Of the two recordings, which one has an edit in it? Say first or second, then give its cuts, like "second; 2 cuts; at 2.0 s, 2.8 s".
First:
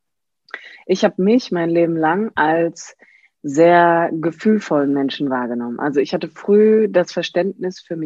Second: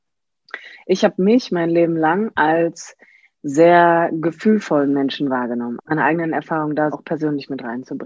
second; 2 cuts; at 5.8 s, 6.9 s